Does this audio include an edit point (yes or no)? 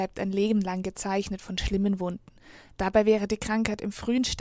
no